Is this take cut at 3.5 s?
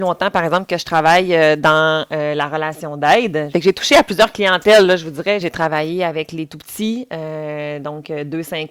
yes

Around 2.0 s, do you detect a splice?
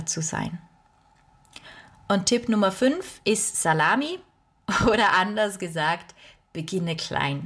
no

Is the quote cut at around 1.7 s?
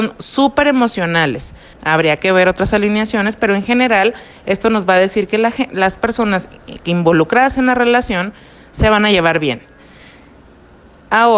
yes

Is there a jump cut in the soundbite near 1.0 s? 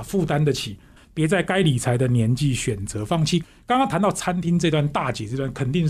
yes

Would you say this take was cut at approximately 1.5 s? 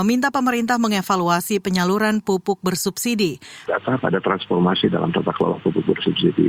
no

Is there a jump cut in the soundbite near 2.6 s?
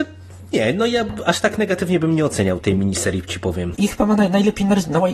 yes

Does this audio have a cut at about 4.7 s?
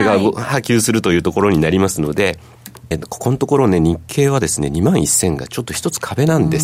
no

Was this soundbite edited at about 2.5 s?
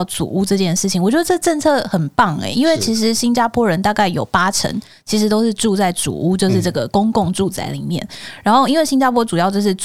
no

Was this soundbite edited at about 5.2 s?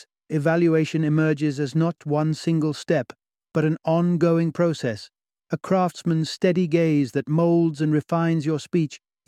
no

